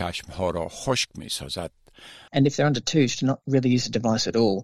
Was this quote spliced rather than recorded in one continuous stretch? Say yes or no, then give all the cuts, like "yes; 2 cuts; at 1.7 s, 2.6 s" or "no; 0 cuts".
yes; 1 cut; at 2.3 s